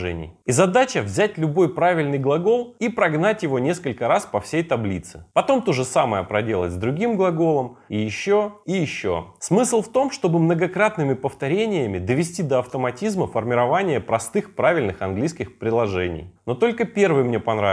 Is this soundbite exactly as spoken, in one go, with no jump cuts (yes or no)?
no